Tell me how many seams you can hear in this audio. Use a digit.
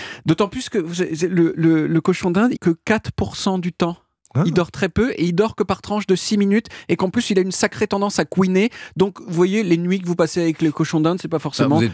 1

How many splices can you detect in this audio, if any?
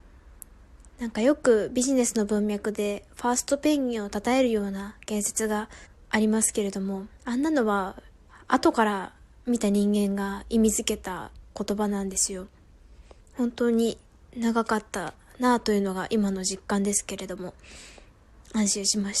2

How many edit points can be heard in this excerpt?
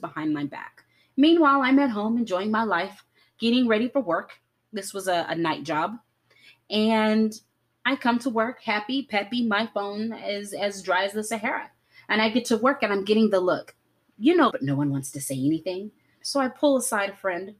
2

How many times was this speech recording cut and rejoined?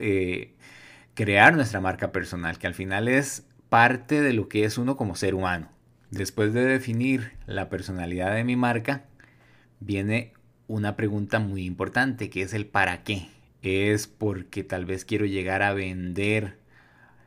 1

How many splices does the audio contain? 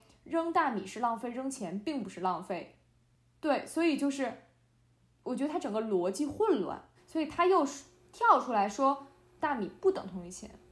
2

